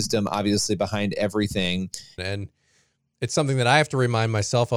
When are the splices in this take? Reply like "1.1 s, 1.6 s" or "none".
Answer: 2.2 s